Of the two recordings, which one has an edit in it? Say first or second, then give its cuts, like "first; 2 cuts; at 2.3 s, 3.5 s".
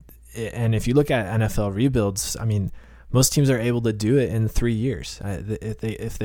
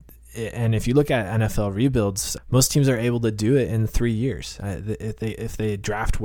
second; 1 cut; at 2.4 s